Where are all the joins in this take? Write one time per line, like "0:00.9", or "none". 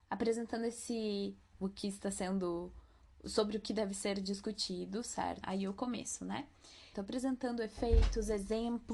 0:01.5
0:05.4
0:06.9